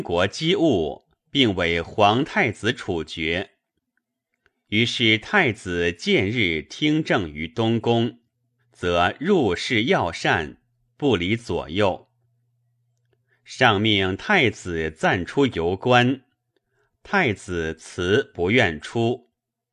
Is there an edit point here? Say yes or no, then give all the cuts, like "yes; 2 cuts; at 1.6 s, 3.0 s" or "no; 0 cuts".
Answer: yes; 1 cut; at 8.6 s